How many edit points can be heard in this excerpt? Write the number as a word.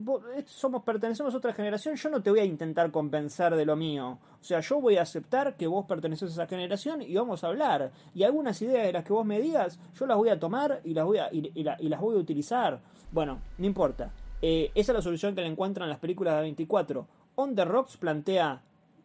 one